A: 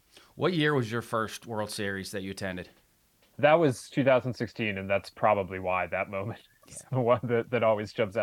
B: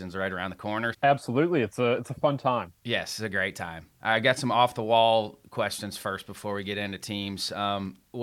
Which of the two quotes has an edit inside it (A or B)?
B